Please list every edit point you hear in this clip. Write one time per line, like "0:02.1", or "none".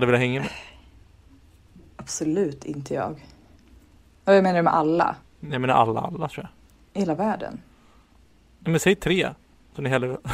0:05.2